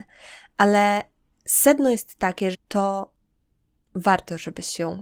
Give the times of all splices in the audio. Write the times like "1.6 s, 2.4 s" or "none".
2.5 s